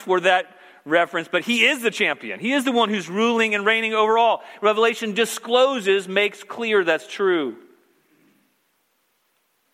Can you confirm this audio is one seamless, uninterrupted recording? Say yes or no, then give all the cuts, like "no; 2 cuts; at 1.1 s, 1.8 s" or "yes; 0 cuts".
yes; 0 cuts